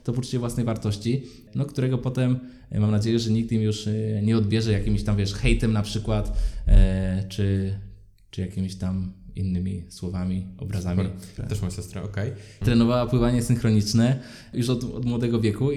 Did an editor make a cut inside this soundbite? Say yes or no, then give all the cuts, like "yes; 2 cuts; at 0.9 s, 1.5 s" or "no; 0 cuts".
yes; 2 cuts; at 11.4 s, 12.6 s